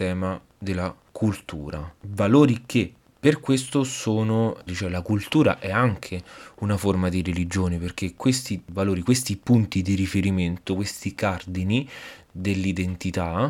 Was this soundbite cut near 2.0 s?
no; 1 cut; at 4.7 s

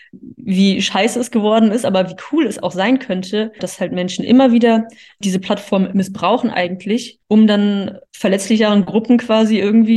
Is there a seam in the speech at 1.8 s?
no; 2 cuts; at 3.6 s, 7.2 s

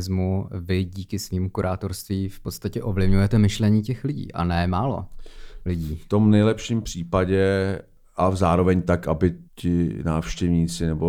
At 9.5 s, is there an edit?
yes; 1 cut; at 9.5 s

